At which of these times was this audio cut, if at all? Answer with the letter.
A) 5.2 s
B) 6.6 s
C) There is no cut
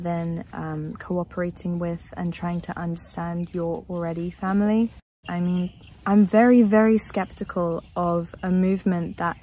A